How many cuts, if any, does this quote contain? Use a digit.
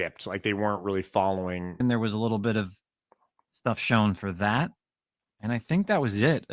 1